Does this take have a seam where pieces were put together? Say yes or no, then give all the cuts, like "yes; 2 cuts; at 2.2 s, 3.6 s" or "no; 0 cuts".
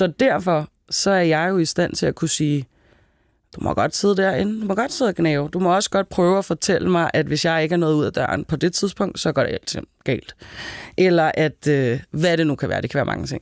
no; 0 cuts